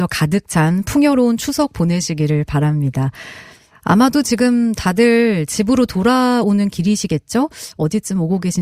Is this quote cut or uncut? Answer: uncut